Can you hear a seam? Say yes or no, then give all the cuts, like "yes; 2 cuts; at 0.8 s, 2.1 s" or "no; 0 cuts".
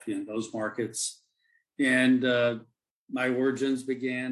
no; 0 cuts